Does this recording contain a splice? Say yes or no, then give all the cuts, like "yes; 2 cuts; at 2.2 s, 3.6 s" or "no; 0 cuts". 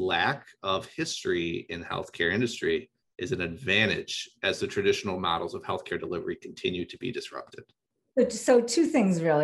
no; 0 cuts